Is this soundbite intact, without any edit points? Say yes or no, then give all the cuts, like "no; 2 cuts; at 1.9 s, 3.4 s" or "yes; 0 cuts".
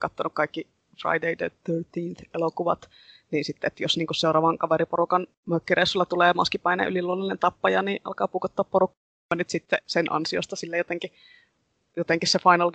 yes; 0 cuts